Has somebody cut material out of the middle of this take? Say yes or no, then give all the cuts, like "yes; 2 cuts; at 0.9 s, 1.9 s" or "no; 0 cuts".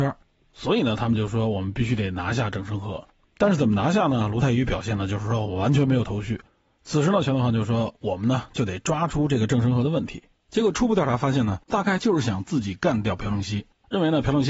yes; 2 cuts; at 10.3 s, 11.7 s